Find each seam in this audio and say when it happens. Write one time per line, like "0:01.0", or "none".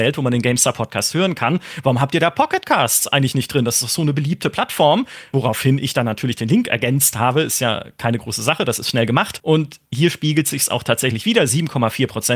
none